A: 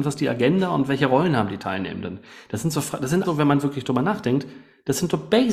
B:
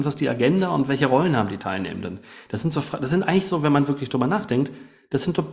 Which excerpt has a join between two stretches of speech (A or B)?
A